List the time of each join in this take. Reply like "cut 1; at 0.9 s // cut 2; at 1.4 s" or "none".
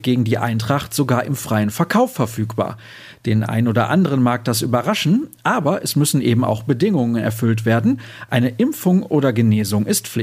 none